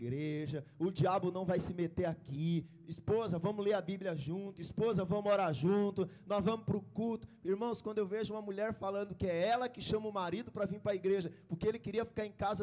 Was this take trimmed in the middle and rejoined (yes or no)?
no